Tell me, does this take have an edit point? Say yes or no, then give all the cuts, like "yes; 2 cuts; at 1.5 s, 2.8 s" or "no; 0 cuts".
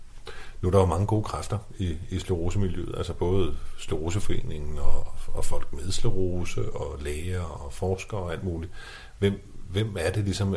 no; 0 cuts